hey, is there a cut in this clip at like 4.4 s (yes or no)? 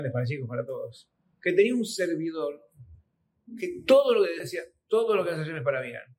yes